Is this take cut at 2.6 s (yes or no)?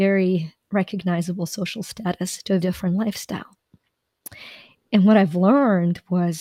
yes